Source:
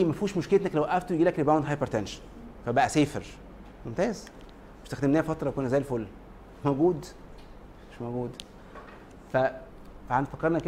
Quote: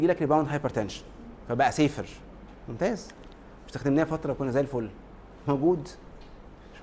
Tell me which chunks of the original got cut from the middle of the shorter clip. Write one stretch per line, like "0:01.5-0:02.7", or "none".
none

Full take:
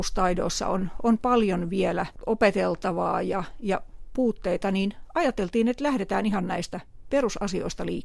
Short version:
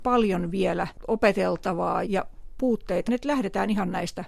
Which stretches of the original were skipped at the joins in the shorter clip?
0:03.2-0:03.6
0:04.6-0:05.6

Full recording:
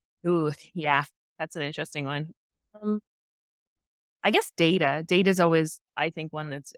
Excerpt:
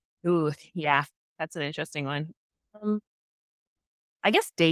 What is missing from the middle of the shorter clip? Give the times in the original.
none

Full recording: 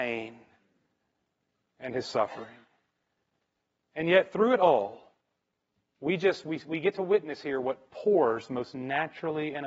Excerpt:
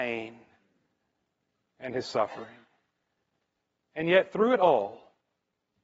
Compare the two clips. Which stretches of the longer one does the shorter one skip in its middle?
none

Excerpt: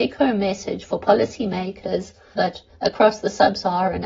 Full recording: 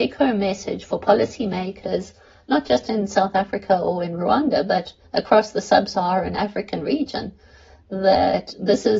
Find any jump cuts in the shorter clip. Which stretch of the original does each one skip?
0:02.4-0:04.7

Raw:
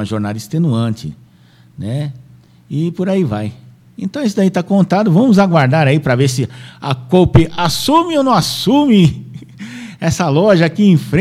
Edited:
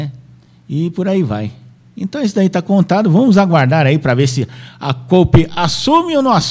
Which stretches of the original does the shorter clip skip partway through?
none

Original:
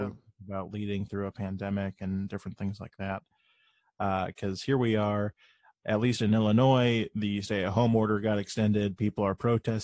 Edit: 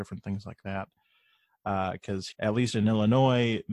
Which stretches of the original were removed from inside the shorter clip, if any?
0:04.7-0:05.8

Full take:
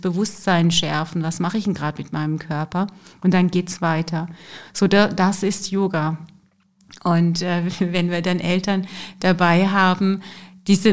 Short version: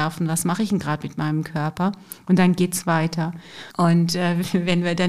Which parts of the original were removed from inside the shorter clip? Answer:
0:04.7-0:07.0

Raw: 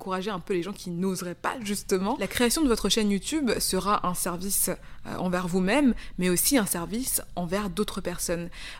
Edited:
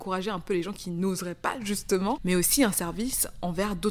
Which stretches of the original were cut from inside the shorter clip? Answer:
0:02.2-0:06.1

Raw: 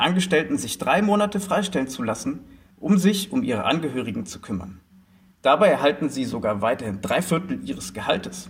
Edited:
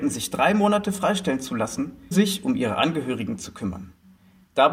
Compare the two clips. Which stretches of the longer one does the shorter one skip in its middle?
0:02.6-0:03.0

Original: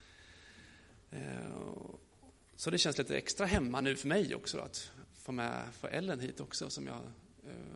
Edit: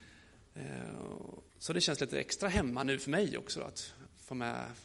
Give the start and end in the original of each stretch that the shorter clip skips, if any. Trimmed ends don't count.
0:02.0-0:02.5

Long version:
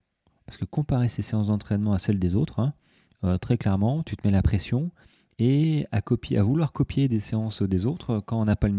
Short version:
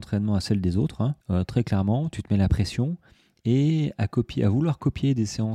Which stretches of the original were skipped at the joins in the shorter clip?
0:02.8-0:03.1

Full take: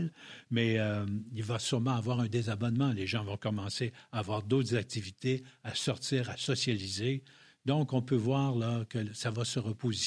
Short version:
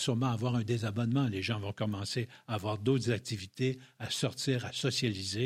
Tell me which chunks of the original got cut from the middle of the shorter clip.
none

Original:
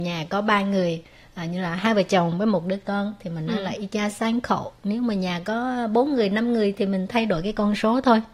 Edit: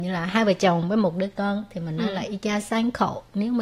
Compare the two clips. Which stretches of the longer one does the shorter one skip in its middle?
none

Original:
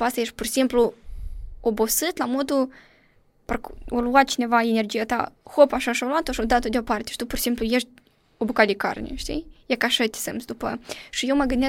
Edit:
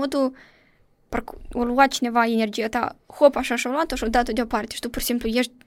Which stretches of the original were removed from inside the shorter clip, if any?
none

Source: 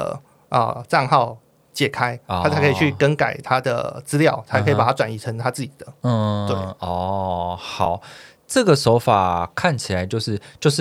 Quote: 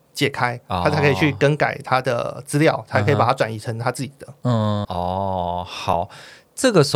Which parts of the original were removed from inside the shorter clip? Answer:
0:06.4-0:06.8

